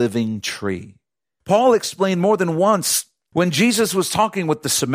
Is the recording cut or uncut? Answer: cut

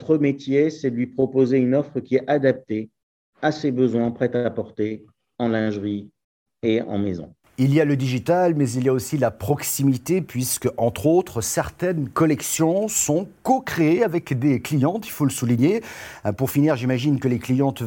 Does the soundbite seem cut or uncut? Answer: uncut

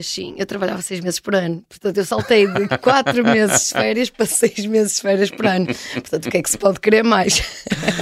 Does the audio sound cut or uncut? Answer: uncut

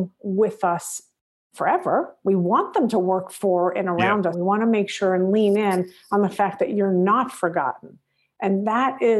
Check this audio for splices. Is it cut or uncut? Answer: cut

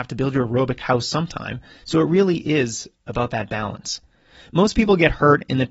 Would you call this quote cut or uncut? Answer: uncut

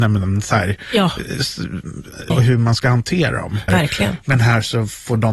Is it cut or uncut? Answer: cut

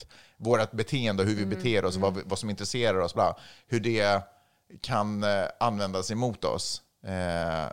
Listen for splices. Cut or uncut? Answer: cut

